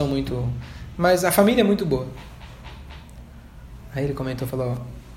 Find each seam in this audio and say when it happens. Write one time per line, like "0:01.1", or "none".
none